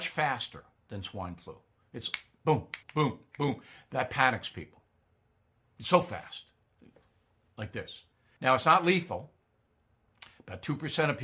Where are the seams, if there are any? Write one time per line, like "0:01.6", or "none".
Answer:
0:02.8
0:08.4